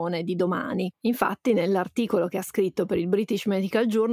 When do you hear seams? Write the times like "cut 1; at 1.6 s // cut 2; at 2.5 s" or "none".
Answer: cut 1; at 0.9 s